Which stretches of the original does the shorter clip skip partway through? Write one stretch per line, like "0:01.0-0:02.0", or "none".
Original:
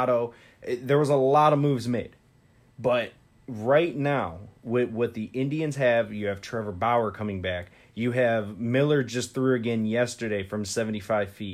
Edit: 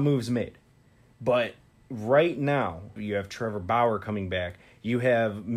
0:04.5-0:06.1